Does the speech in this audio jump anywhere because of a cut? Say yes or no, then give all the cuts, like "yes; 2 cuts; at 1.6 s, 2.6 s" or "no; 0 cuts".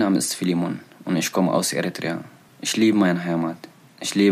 no; 0 cuts